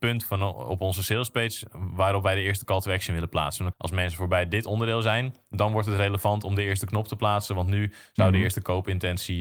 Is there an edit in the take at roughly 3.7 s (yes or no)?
yes